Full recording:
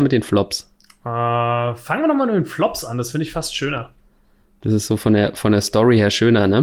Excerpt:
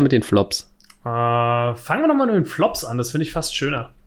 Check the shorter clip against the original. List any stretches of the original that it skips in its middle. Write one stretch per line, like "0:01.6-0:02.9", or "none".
none